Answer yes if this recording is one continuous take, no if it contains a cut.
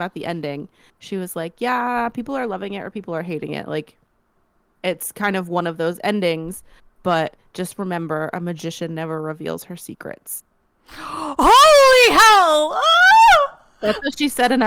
yes